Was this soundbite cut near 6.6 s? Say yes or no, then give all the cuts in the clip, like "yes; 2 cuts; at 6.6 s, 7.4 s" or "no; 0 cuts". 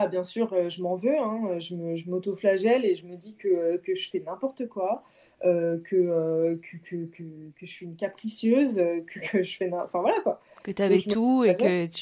no; 0 cuts